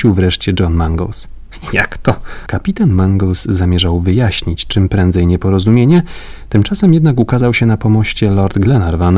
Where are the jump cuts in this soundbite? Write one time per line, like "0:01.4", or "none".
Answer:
0:02.5